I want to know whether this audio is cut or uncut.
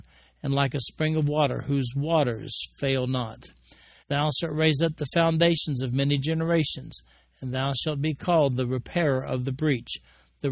cut